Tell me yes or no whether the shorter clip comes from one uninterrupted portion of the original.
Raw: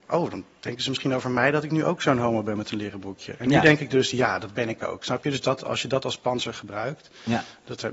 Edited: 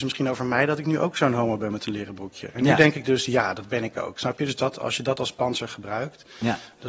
yes